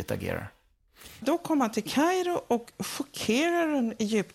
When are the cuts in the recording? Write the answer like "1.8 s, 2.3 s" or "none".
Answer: 1.2 s